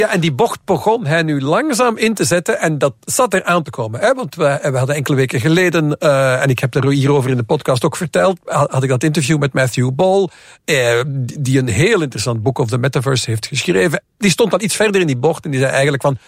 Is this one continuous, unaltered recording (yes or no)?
yes